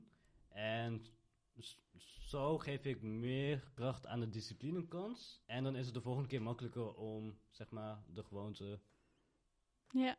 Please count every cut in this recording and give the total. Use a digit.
1